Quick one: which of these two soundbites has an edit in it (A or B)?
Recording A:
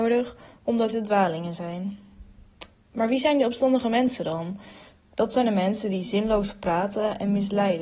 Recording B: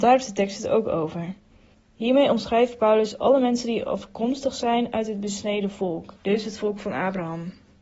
B